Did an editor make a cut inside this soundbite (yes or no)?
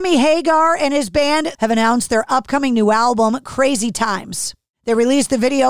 yes